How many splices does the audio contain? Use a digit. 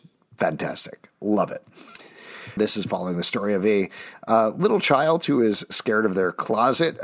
1